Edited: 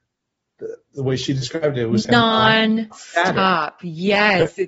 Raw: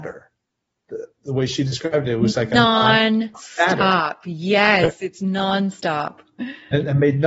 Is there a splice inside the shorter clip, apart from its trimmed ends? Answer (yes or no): yes